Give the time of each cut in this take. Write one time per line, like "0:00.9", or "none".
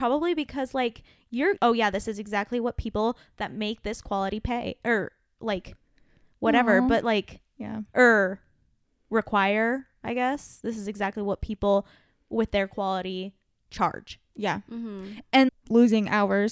0:01.6
0:15.5